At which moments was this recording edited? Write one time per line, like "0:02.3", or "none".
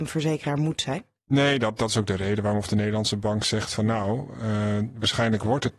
none